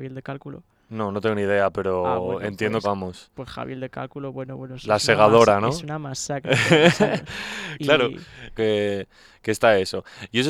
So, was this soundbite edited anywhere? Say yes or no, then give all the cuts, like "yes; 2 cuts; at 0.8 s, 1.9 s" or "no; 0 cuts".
yes; 2 cuts; at 2.8 s, 8.6 s